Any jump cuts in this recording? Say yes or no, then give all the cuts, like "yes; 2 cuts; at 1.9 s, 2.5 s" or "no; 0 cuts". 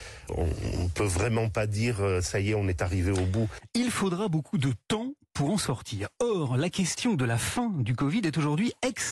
no; 0 cuts